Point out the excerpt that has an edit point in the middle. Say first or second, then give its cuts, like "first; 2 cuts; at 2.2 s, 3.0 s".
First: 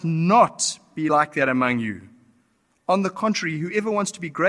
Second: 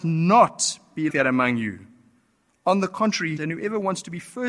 second; 2 cuts; at 1.1 s, 3.4 s